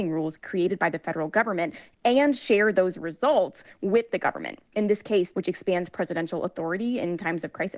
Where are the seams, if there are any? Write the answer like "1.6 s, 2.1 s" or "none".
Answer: 5.3 s